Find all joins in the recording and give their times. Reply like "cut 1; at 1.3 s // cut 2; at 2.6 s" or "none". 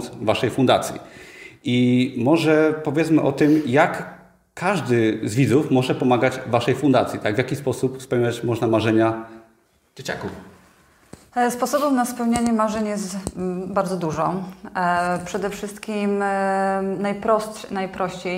none